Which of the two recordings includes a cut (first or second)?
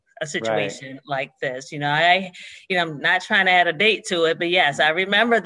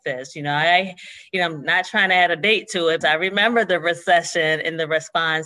second